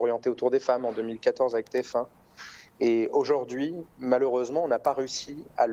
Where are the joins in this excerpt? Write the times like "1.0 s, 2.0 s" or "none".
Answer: 2.7 s